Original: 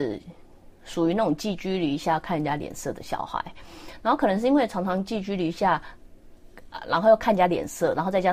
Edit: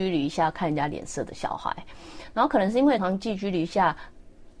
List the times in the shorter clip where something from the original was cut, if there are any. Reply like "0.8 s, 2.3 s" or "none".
3.0 s